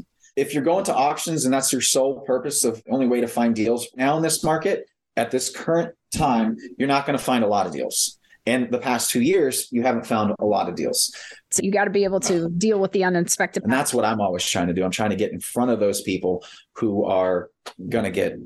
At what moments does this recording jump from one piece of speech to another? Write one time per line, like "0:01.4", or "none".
0:06.0
0:11.5
0:13.6